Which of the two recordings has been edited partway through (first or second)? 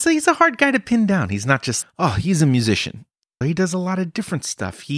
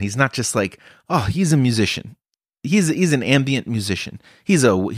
first